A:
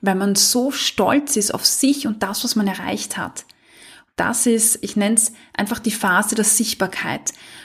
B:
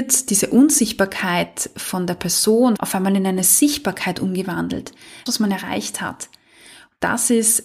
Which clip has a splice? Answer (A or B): B